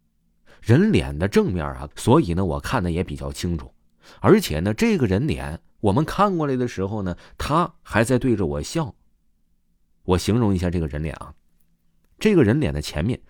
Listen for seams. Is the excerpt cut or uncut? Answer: cut